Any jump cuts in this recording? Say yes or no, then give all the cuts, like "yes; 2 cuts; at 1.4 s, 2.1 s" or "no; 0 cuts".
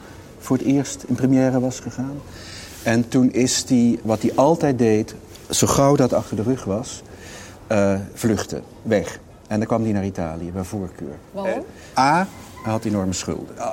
yes; 2 cuts; at 4.0 s, 9.4 s